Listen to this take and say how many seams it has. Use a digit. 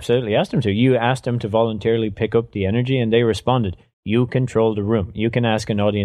0